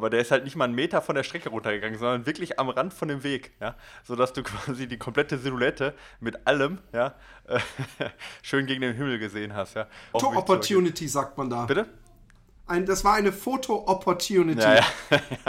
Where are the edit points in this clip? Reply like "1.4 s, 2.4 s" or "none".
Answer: 10.1 s

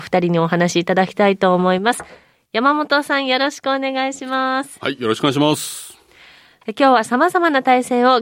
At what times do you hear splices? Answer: 6.6 s

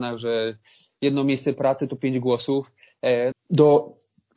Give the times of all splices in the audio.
3.3 s

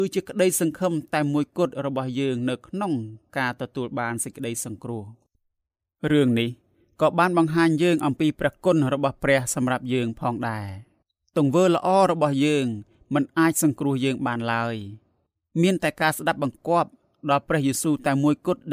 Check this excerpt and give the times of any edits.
none

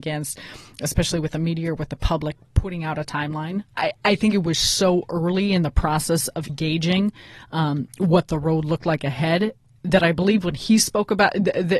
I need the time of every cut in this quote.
3.8 s, 6.5 s

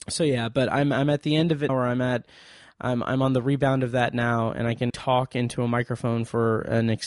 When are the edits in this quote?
1.7 s, 4.9 s

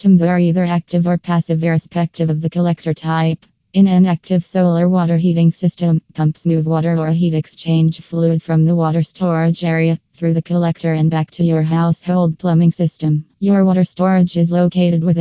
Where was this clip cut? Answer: 3.6 s, 13.3 s

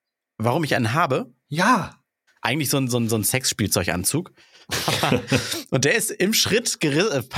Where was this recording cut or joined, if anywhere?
2.3 s

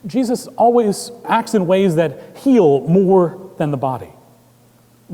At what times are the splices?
1.2 s

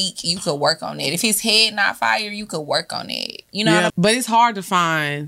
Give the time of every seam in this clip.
3.9 s

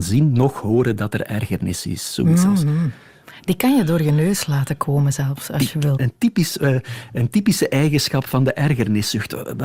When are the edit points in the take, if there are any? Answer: 6.0 s

